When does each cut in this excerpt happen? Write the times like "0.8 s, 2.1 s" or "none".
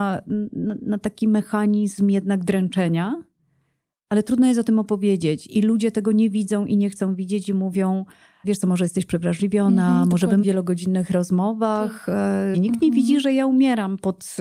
8.4 s, 10.4 s, 12.5 s